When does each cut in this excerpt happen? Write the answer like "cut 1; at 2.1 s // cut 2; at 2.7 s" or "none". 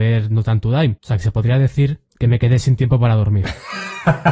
cut 1; at 1.0 s // cut 2; at 2.1 s